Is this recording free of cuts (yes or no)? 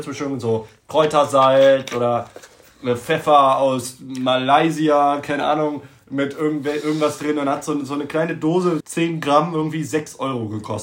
no